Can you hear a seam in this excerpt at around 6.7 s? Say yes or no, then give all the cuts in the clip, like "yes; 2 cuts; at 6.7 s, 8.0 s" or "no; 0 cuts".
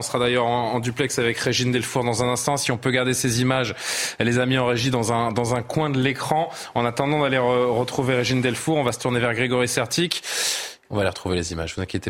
no; 1 cut; at 10.8 s